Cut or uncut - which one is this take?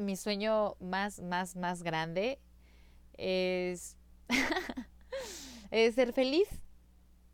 uncut